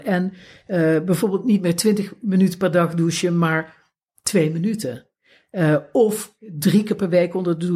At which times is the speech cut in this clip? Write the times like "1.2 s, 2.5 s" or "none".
none